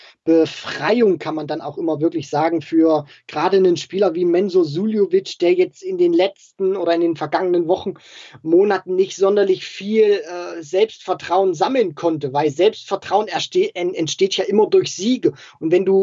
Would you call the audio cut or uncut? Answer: uncut